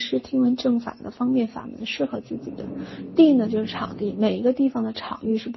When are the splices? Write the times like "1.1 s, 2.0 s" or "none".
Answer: none